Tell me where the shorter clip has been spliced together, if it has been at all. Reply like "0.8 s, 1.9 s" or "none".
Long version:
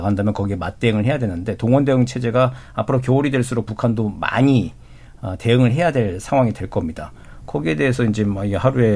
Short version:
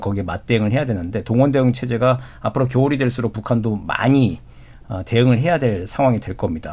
none